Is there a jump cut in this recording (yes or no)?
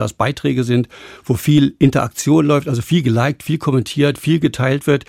no